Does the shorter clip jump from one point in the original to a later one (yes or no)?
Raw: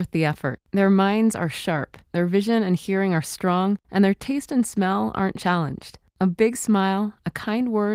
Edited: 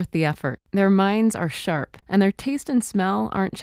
yes